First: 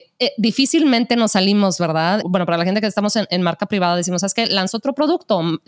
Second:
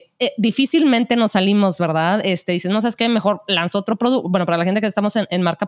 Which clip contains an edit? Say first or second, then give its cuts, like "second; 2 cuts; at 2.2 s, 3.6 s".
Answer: first; 1 cut; at 2.2 s